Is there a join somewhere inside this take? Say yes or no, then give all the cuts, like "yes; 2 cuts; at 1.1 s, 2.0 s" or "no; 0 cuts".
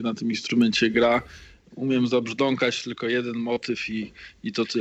no; 0 cuts